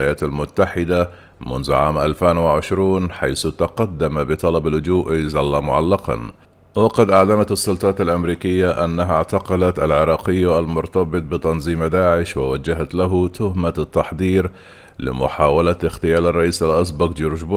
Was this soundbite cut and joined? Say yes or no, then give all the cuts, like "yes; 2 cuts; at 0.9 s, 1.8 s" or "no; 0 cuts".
no; 0 cuts